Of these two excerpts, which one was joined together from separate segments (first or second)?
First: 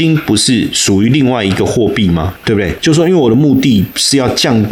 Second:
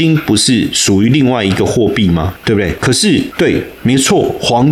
first